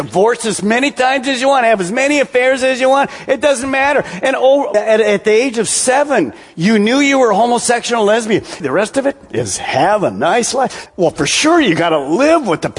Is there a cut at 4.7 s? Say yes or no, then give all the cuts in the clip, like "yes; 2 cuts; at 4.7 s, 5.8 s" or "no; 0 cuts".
yes; 3 cuts; at 4.7 s, 8.6 s, 10.9 s